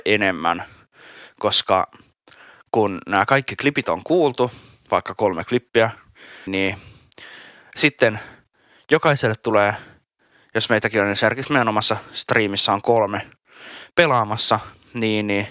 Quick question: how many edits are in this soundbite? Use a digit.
1